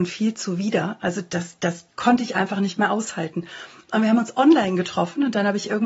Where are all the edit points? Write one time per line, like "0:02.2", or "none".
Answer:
none